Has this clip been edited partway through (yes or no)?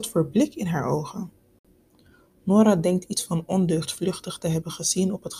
no